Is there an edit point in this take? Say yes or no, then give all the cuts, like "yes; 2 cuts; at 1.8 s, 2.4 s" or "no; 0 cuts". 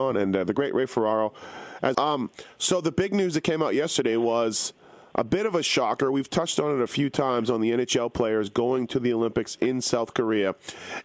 yes; 1 cut; at 1.9 s